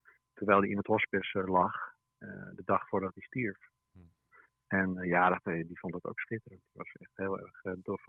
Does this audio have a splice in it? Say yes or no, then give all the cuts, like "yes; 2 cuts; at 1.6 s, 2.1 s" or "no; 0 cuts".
no; 0 cuts